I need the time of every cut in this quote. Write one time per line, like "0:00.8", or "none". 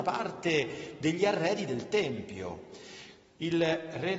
0:03.3